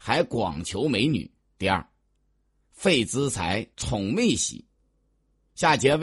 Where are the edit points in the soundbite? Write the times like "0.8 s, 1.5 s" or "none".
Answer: 1.6 s, 3.7 s